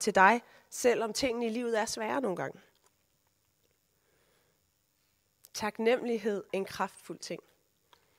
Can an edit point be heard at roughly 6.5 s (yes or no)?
yes